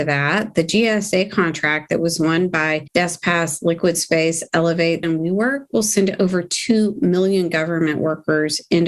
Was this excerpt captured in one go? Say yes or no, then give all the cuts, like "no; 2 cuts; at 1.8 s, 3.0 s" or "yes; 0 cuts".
no; 1 cut; at 5.0 s